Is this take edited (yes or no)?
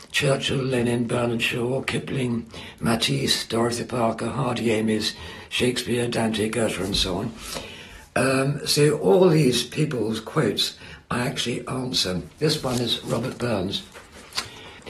no